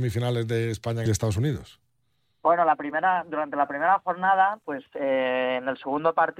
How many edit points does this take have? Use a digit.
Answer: 1